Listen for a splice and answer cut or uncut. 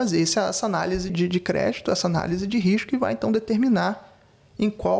cut